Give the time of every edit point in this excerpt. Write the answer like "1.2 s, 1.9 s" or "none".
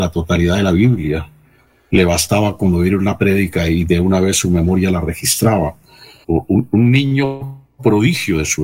6.2 s